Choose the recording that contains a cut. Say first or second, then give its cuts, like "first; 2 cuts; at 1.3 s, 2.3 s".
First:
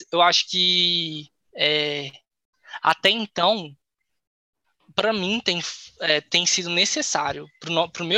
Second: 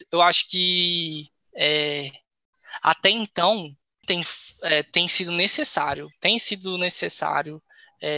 second; 2 cuts; at 4.0 s, 6.1 s